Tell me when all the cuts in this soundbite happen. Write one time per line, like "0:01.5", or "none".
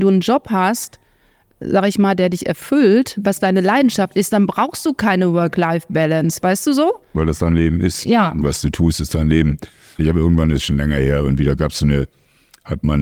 0:10.0